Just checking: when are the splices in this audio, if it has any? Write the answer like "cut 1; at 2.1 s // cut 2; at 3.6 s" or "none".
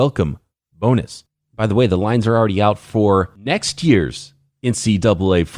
none